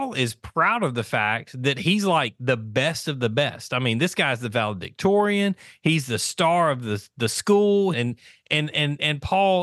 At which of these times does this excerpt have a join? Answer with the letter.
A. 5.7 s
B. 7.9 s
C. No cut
B